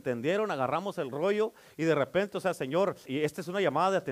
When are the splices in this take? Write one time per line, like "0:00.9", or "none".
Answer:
0:03.1